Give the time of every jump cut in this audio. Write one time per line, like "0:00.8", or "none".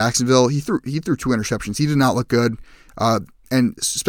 none